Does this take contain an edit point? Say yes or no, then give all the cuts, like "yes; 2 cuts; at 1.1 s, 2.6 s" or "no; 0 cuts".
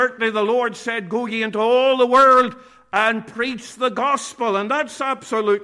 no; 0 cuts